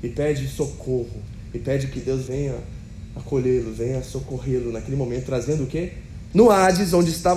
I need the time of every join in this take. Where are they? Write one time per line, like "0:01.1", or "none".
0:06.3